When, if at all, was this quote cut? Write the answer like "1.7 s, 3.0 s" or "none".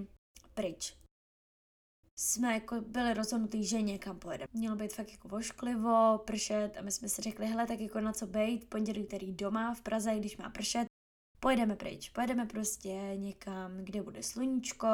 4.5 s